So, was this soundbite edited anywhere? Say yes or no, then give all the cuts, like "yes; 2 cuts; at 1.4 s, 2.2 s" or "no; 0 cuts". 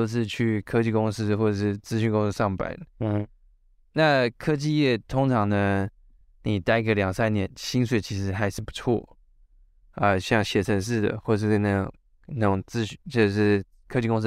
no; 0 cuts